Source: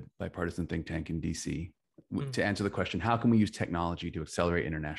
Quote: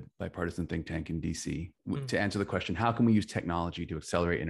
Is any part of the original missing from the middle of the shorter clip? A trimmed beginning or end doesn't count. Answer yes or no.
yes